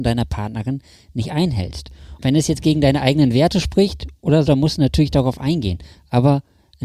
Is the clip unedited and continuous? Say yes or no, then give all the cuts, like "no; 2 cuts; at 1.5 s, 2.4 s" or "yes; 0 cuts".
no; 2 cuts; at 2.2 s, 4.5 s